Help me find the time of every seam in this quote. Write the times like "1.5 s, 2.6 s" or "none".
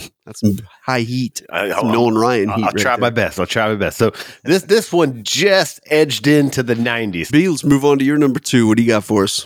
7.3 s